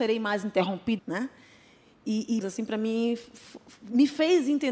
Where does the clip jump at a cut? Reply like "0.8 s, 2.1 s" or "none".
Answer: 1.0 s, 2.4 s